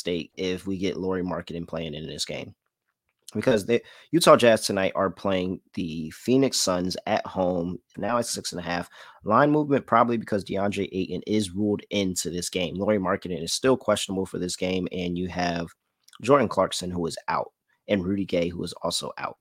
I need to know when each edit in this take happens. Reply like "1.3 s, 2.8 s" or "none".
7.9 s